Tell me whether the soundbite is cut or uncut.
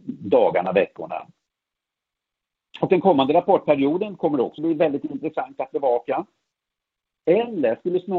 cut